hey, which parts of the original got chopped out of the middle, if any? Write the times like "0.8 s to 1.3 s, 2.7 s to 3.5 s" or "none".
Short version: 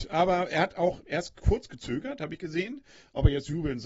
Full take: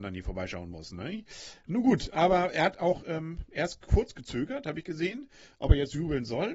3.0 s to 3.5 s